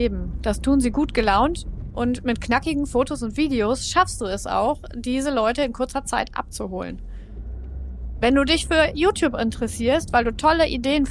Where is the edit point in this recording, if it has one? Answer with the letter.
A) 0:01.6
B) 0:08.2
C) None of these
C